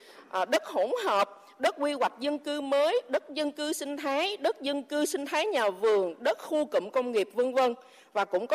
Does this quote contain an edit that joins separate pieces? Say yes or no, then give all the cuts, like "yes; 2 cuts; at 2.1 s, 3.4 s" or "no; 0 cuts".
no; 0 cuts